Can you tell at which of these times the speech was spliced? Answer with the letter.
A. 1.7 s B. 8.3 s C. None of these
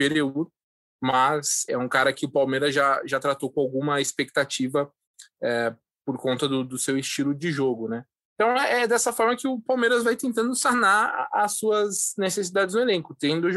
A